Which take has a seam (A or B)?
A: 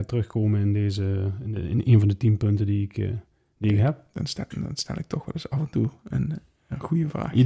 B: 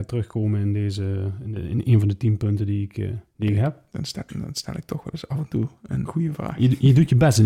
B